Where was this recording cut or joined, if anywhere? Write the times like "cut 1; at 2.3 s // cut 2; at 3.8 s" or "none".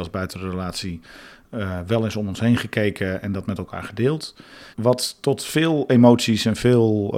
cut 1; at 4.7 s